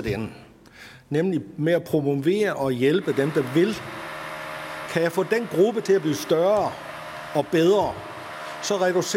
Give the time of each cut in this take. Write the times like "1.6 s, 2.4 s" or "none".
4.9 s